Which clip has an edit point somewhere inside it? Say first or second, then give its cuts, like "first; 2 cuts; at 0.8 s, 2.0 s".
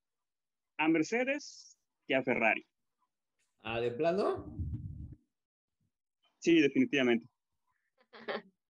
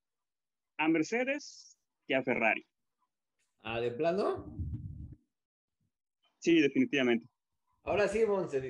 first; 1 cut; at 7.7 s